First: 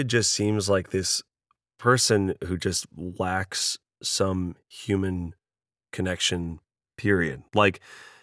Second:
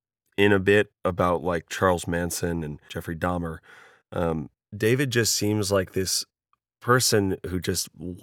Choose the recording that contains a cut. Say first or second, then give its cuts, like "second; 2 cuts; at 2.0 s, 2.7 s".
second; 1 cut; at 4.6 s